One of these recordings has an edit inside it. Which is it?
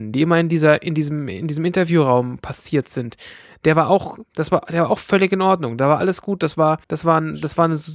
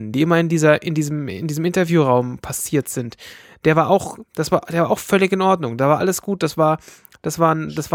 first; 1 cut; at 6.8 s

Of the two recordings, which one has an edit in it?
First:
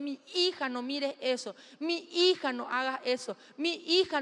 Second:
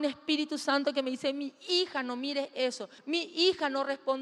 second; 1 cut; at 3.0 s

